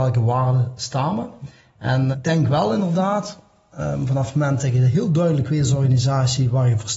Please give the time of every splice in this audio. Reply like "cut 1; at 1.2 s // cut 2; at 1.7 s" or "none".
cut 1; at 2.1 s